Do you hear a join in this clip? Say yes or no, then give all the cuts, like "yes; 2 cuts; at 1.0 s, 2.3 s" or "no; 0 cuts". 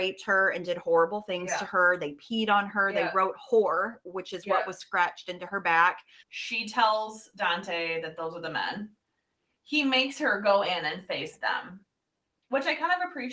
yes; 1 cut; at 6.2 s